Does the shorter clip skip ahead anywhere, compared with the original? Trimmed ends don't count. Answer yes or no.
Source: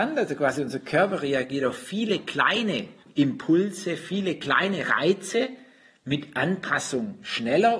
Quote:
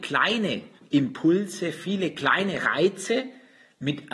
no